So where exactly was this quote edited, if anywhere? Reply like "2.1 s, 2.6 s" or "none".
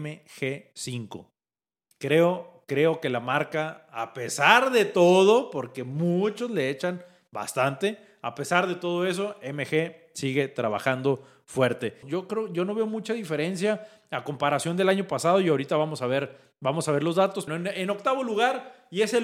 1.9 s, 12.0 s, 17.5 s